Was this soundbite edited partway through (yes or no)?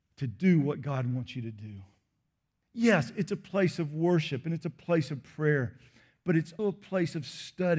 yes